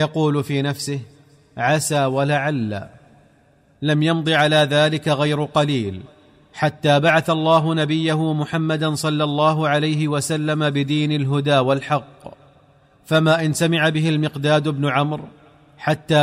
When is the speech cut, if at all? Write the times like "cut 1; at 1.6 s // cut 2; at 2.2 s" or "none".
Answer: none